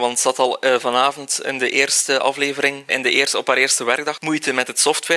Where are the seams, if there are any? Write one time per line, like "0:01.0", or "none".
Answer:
0:02.9
0:04.2

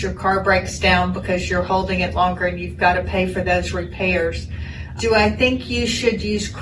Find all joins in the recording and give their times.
0:05.0

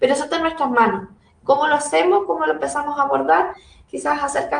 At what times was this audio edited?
none

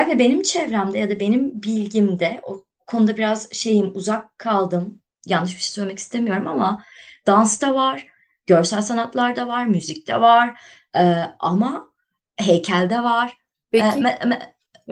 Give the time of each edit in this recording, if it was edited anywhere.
0:13.7

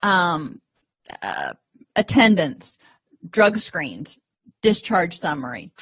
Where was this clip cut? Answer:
none

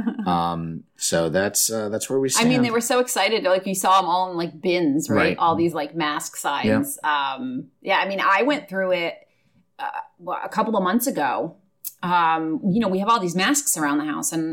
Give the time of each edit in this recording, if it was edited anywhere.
none

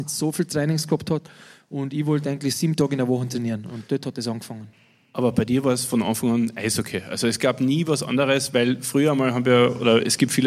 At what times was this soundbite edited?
none

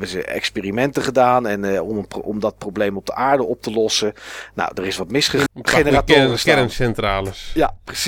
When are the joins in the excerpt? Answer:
0:05.5

